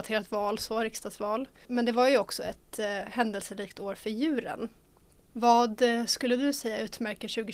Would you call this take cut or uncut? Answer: uncut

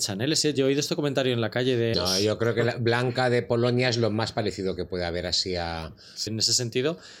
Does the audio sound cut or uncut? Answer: cut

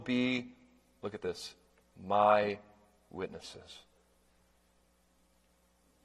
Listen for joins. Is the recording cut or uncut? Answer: uncut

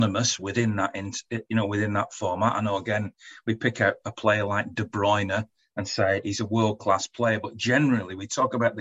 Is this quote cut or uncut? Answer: uncut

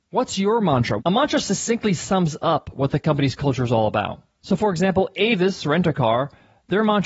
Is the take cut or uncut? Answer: cut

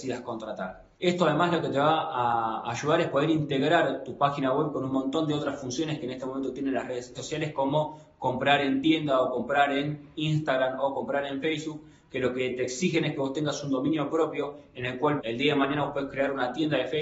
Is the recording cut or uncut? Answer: cut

